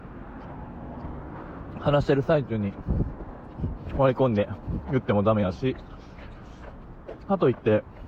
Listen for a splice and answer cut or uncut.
uncut